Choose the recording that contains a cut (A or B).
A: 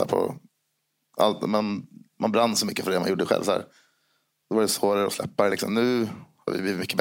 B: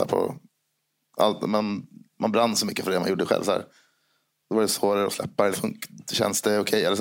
B